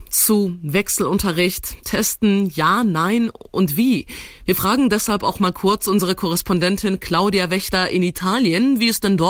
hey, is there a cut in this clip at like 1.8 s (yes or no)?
no